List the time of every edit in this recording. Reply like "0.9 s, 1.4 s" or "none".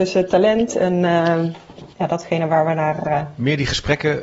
1.9 s